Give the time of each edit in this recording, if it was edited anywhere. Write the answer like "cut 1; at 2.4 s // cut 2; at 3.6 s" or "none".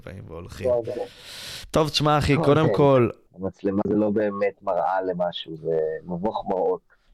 cut 1; at 3.3 s // cut 2; at 5.6 s